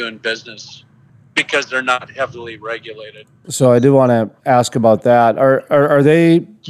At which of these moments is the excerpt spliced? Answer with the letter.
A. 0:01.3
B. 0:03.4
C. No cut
B